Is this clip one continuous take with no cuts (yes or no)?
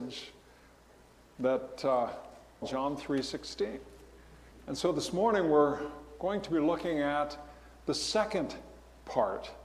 no